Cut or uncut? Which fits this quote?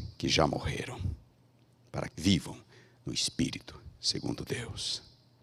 cut